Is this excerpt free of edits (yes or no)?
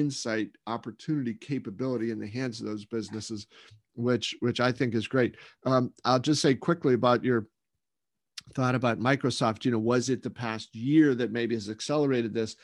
yes